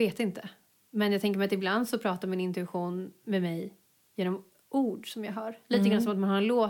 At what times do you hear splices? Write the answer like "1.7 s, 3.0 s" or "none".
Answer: none